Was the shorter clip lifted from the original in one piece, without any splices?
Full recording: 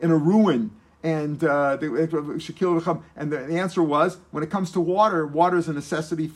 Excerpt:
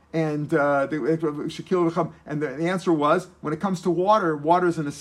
yes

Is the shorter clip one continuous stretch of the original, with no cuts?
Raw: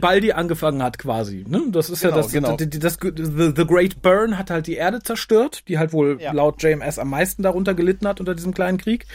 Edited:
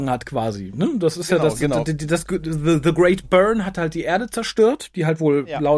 yes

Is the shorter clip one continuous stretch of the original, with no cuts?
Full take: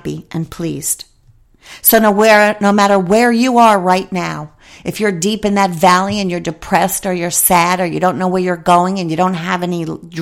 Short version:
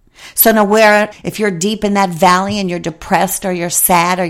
no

